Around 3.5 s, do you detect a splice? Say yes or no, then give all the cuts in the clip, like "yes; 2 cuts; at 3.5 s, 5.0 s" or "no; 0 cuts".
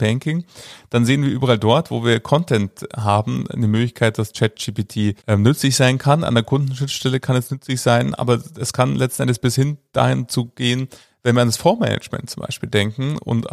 no; 1 cut; at 5.2 s